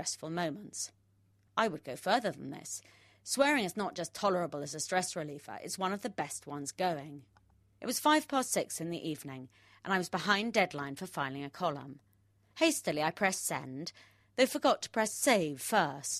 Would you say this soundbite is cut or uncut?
cut